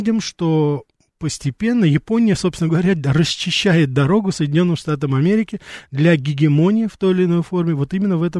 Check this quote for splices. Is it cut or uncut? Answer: uncut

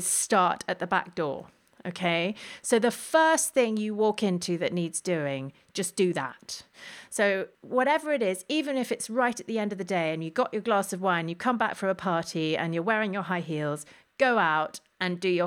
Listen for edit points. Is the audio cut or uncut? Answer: uncut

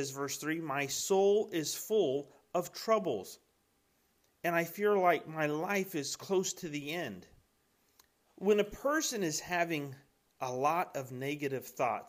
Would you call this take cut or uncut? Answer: cut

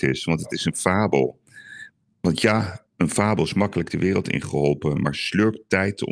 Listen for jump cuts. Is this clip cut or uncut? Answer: uncut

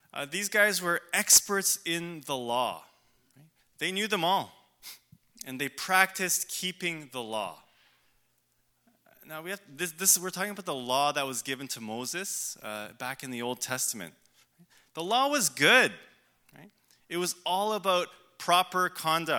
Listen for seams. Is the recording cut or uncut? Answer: uncut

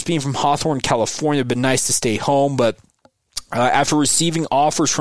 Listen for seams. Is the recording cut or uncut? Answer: uncut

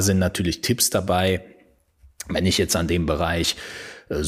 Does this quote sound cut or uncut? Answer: uncut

